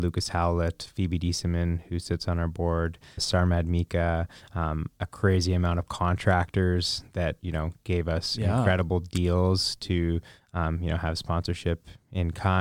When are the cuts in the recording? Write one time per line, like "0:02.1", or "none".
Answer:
0:03.2